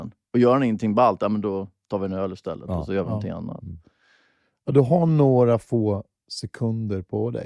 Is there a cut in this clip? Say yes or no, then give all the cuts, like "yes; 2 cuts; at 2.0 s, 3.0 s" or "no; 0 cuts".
no; 0 cuts